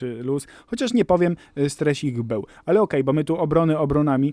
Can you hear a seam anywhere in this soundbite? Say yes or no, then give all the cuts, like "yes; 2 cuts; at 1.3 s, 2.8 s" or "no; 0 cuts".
no; 0 cuts